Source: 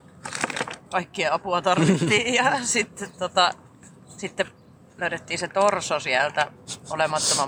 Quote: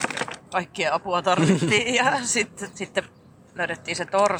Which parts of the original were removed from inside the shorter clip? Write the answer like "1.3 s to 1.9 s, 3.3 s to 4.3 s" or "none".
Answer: 3.1 s to 4.2 s